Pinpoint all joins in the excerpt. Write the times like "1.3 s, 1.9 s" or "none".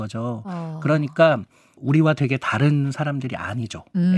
none